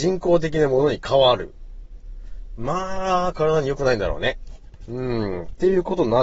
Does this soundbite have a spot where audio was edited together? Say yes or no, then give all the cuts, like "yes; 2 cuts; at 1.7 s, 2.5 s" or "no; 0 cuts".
yes; 1 cut; at 2.6 s